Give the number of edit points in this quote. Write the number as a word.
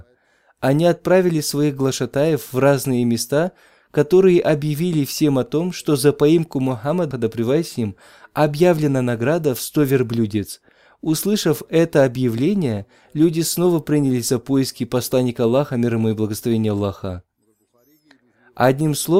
one